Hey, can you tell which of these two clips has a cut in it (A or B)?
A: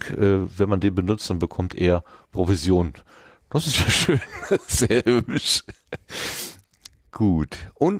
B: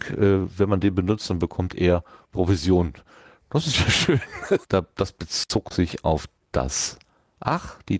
B